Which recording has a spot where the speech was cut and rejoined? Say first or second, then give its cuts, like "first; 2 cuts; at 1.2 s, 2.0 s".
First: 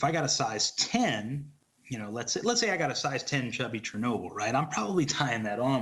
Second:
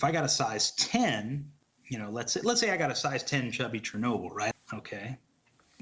second; 1 cut; at 4.5 s